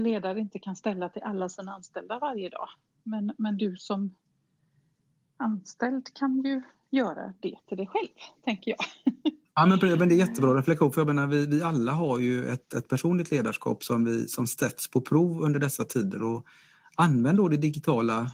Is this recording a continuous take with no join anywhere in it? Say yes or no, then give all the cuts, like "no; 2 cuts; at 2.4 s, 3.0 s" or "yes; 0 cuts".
yes; 0 cuts